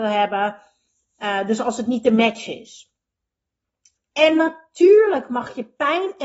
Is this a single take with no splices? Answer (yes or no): no